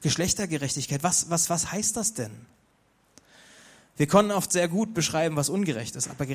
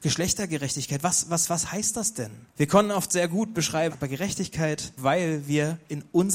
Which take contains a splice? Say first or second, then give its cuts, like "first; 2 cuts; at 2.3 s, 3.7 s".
second; 3 cuts; at 2.5 s, 3.9 s, 5.0 s